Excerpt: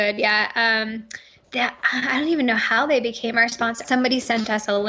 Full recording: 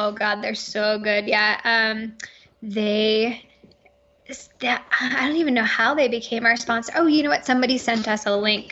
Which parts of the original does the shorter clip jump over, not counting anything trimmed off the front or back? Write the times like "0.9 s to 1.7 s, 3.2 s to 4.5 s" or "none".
2.5 s to 4.5 s, 6.9 s to 7.4 s